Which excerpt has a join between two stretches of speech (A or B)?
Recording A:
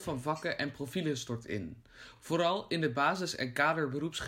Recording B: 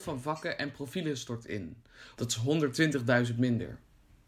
B